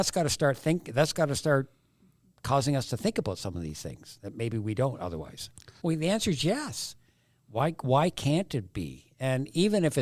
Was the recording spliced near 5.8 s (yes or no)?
yes